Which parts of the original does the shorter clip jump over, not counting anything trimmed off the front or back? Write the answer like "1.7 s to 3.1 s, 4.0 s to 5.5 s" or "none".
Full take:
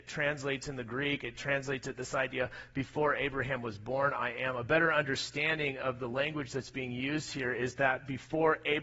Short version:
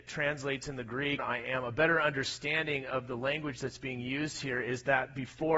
1.2 s to 4.1 s